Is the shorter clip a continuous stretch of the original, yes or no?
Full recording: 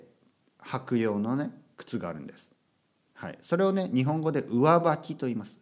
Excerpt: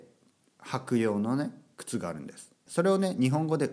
no